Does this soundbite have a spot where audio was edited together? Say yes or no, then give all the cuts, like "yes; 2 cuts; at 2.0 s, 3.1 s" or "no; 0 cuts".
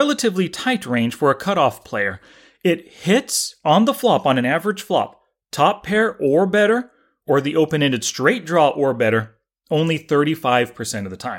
no; 0 cuts